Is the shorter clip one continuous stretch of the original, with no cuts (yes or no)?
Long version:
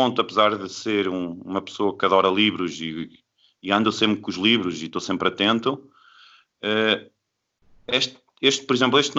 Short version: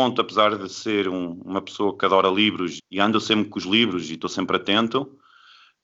no